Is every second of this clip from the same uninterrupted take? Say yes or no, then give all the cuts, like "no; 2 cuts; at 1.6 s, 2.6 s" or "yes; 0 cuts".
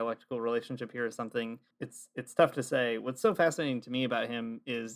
no; 1 cut; at 1.7 s